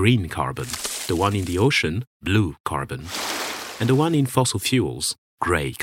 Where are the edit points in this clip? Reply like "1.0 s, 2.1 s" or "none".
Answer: none

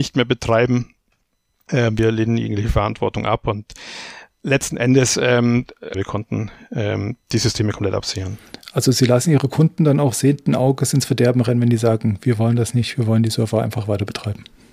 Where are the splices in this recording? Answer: 5.9 s

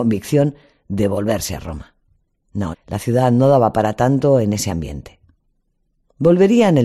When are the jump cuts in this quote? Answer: 2.7 s

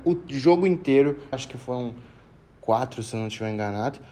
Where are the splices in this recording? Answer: 1.3 s

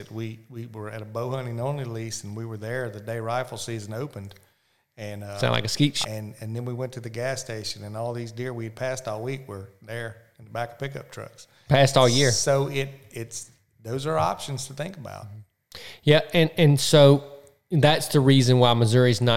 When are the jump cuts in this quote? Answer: 6.0 s

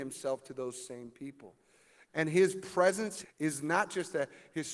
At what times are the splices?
2.1 s, 3.2 s

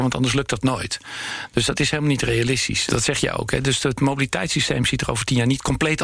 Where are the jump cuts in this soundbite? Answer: 2.9 s

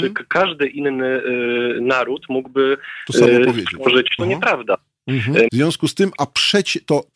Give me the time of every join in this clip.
4.2 s, 5.5 s

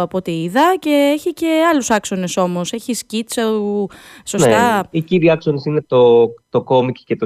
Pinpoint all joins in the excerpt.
none

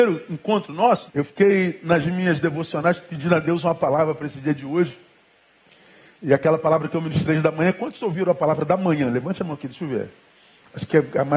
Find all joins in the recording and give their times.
1.1 s

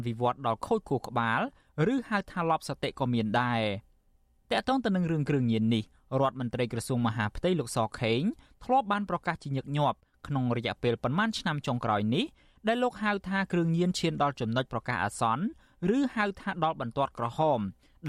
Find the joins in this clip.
none

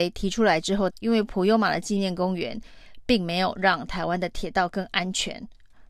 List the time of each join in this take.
0.9 s

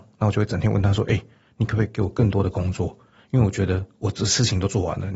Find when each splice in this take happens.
none

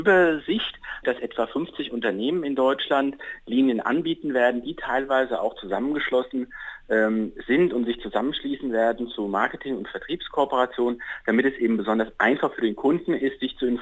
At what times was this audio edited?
1.0 s

